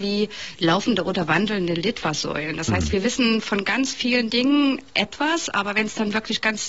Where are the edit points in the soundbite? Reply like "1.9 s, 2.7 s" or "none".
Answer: none